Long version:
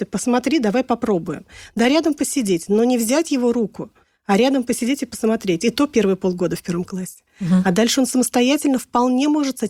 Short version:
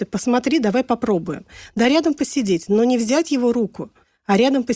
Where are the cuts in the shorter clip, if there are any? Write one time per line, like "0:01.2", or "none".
none